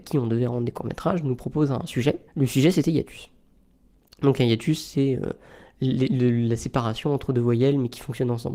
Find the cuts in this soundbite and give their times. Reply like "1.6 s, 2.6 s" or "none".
2.3 s